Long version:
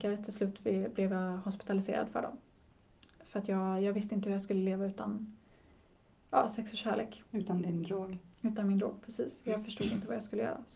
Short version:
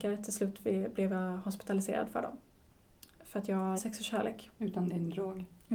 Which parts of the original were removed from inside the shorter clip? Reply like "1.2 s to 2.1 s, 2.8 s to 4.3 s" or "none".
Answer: 3.8 s to 6.5 s